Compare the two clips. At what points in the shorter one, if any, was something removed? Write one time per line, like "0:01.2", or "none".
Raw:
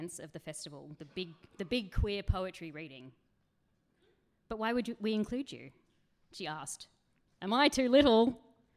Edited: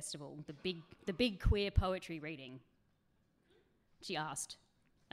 0:03.9